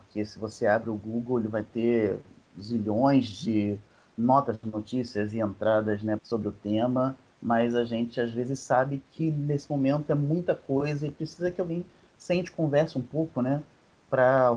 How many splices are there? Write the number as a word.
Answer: one